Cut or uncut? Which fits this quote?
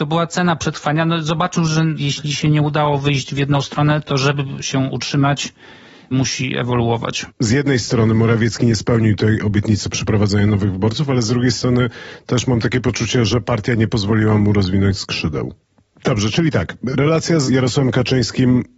uncut